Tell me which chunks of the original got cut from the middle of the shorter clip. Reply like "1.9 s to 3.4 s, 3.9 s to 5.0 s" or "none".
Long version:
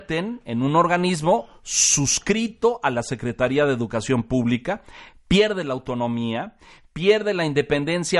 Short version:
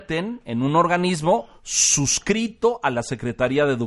none